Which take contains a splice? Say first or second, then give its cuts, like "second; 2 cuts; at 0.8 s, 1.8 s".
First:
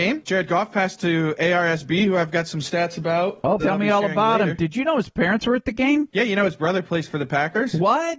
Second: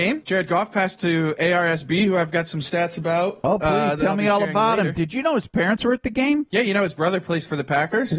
first; 1 cut; at 3.6 s